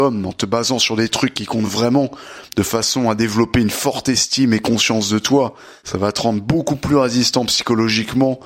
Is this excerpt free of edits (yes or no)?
yes